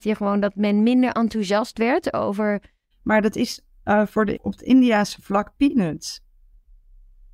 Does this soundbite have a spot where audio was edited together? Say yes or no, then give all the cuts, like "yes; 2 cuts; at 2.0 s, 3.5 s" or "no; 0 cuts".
yes; 2 cuts; at 2.9 s, 4.4 s